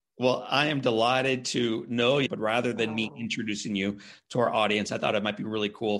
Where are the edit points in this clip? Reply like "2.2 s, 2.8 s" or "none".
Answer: 2.3 s